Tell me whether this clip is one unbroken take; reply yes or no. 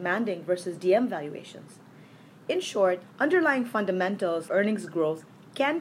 no